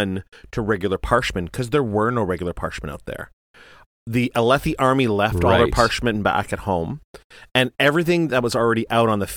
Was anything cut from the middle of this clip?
no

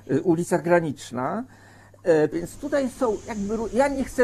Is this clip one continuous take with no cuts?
no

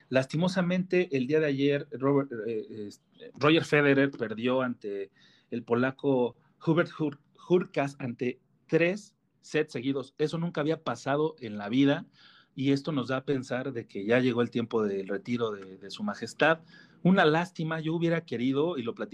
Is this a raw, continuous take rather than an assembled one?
yes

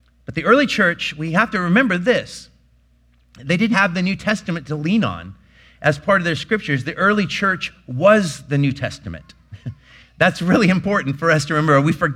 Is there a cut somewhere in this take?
yes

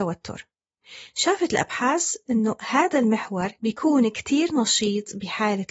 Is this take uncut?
no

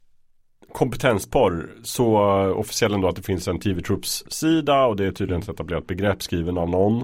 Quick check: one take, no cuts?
yes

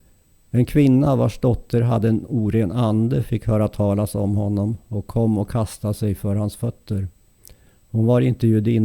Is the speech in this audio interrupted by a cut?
no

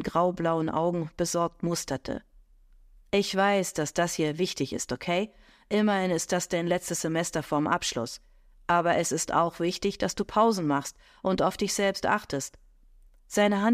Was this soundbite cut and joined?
no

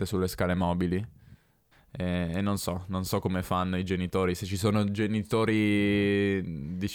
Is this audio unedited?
no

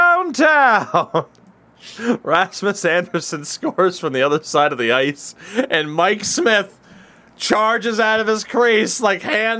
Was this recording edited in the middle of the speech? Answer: no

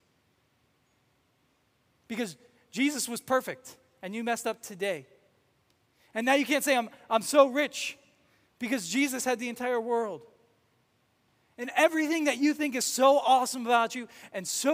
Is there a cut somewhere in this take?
yes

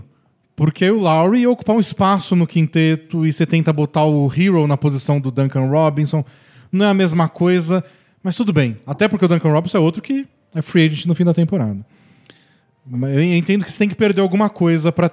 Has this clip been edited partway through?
no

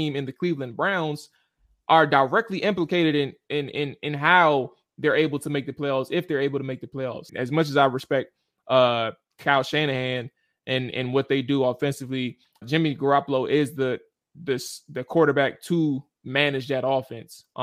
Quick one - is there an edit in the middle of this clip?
yes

